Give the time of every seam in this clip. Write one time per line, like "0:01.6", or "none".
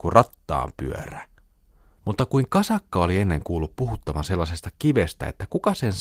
0:02.0